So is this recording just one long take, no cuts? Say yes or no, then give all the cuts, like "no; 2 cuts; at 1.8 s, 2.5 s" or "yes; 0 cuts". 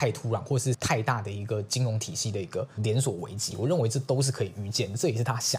no; 1 cut; at 3.5 s